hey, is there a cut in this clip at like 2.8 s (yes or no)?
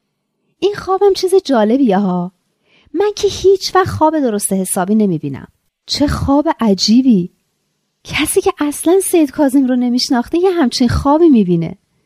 no